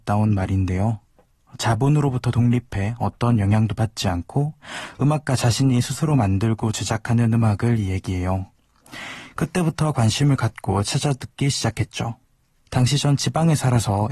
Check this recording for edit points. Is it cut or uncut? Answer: cut